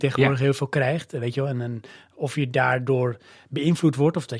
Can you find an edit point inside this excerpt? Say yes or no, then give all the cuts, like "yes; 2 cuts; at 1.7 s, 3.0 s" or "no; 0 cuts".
no; 0 cuts